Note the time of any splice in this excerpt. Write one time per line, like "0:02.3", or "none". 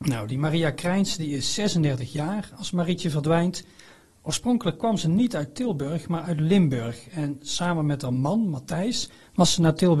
none